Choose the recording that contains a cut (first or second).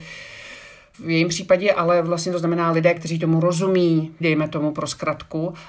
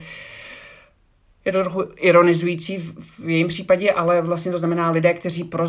first